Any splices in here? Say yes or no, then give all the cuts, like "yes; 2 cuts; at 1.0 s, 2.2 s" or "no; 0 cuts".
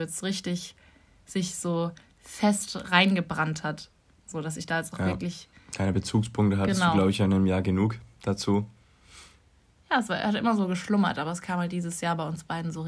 no; 0 cuts